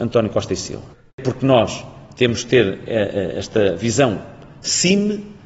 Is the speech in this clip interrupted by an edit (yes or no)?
yes